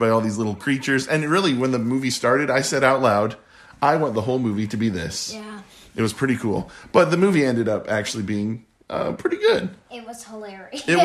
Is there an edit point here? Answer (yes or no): no